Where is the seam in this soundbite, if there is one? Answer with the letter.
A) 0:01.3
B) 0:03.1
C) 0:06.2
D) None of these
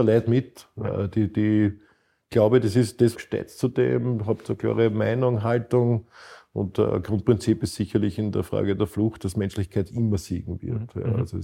B